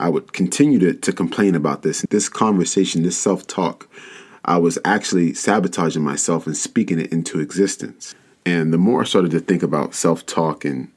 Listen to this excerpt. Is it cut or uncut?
cut